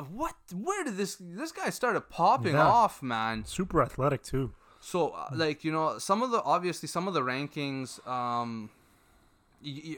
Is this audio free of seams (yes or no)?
yes